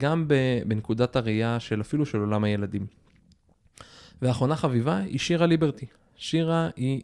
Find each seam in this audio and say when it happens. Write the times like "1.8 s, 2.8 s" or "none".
none